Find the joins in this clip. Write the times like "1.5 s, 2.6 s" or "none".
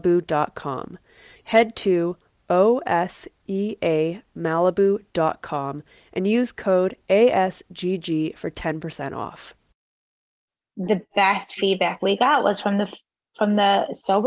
1.4 s